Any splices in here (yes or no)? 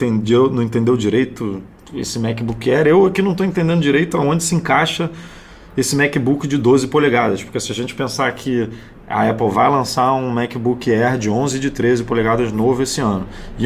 no